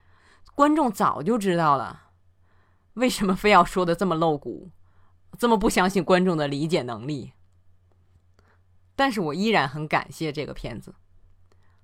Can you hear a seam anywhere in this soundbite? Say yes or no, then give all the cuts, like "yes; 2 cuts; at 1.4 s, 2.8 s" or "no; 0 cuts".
no; 0 cuts